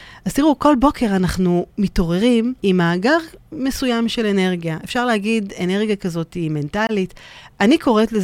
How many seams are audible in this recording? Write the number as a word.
one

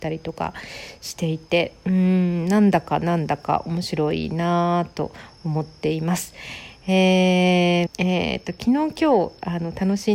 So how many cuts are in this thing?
one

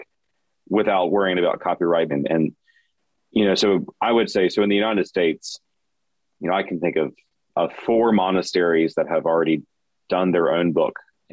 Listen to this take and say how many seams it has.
one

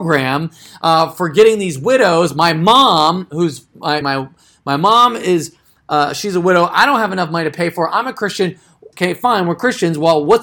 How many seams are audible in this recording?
two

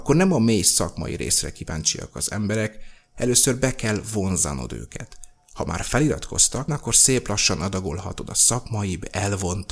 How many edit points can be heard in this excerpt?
one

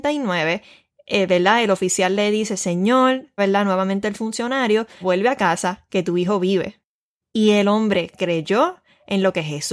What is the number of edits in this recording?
two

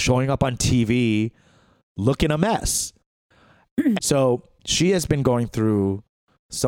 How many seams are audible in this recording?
one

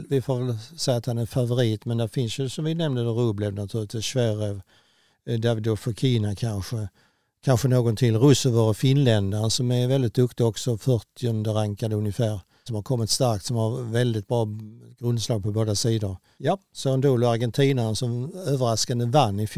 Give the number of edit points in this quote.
two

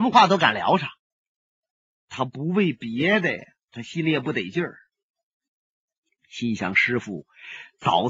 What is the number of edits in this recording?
two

